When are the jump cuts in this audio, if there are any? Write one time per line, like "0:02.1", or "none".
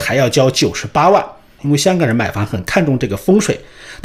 0:01.6

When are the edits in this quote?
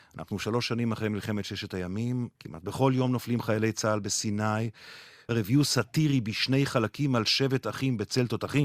0:02.3
0:05.3

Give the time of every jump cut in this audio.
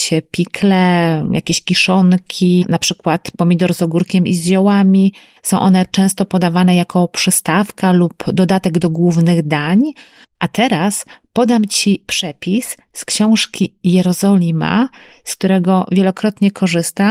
0:02.6
0:05.4
0:10.2

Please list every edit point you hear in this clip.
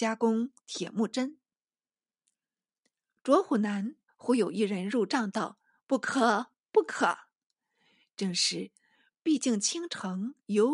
0:04.1

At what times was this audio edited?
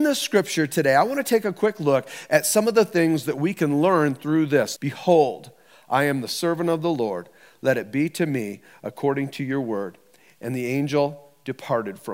0:04.8

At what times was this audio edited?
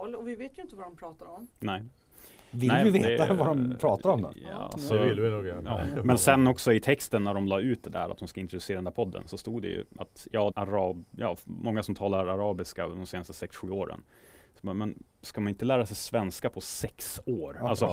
0:10.5

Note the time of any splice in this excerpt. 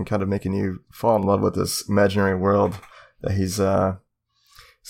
none

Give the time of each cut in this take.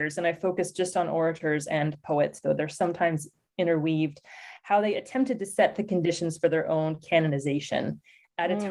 0:02.4

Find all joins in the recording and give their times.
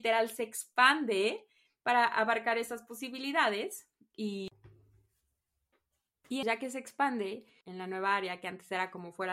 0:06.4
0:07.6

